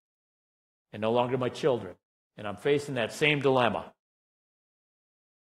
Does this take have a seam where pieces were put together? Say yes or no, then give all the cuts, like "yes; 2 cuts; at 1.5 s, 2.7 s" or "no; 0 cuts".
no; 0 cuts